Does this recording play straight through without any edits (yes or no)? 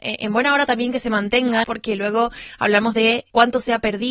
yes